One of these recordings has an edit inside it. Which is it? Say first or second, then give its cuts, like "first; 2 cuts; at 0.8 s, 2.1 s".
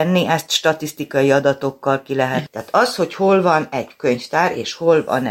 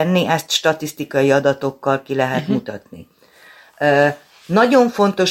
first; 1 cut; at 2.5 s